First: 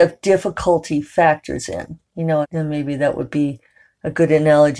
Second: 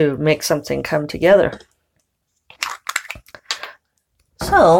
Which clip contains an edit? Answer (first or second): first